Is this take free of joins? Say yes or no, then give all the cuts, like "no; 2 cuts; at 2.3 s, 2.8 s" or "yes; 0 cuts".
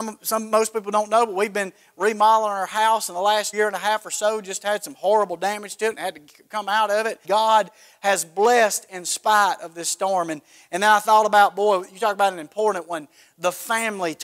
no; 2 cuts; at 3.5 s, 7.2 s